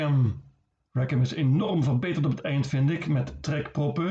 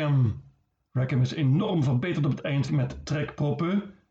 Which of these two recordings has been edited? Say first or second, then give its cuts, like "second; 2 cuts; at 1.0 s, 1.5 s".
second; 1 cut; at 2.7 s